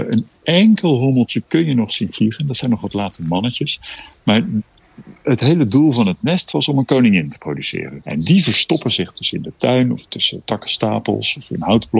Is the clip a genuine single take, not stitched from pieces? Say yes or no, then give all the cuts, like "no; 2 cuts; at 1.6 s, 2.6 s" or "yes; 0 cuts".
yes; 0 cuts